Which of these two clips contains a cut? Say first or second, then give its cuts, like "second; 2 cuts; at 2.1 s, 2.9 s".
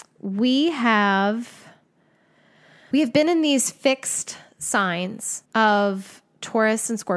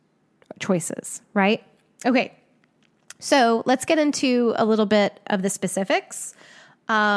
first; 2 cuts; at 2.9 s, 5.5 s